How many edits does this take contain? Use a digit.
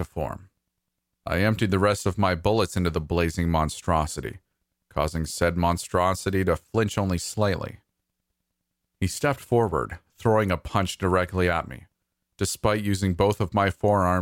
2